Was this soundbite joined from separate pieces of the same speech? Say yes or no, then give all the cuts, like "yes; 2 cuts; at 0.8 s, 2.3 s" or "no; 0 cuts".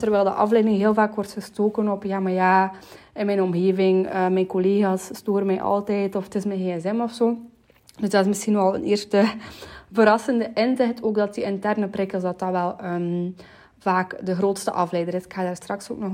no; 0 cuts